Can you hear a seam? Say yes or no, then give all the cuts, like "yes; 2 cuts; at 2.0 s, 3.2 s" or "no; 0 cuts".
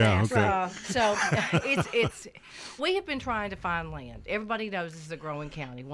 yes; 1 cut; at 2.8 s